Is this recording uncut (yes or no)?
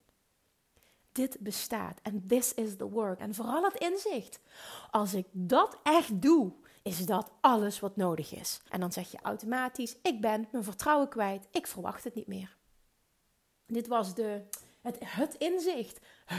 no